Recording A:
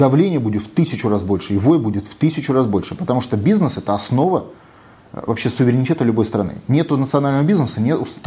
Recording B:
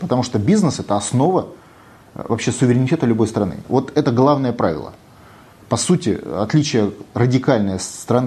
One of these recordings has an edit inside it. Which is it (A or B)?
B